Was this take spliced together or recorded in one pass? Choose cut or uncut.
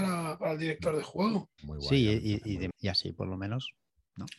cut